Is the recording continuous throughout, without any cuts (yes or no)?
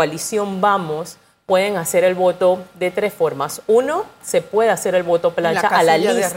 no